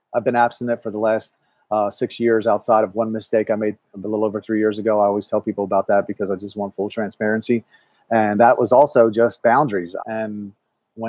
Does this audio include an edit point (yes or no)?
yes